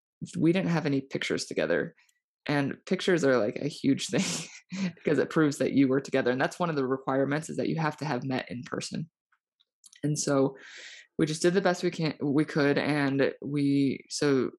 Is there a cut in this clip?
no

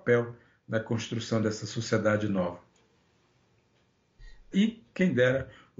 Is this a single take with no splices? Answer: no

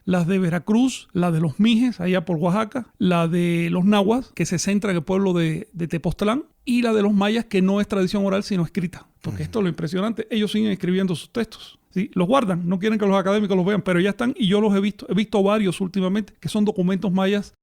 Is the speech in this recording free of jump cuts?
yes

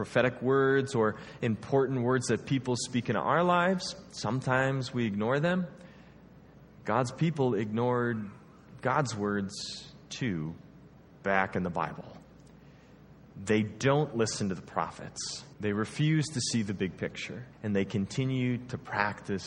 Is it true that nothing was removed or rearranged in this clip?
no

